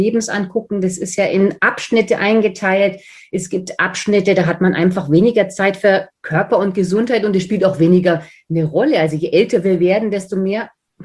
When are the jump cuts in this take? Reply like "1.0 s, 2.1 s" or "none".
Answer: none